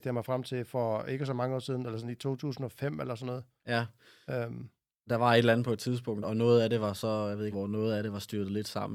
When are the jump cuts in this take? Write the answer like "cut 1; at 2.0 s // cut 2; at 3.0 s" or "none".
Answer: cut 1; at 6.2 s // cut 2; at 7.5 s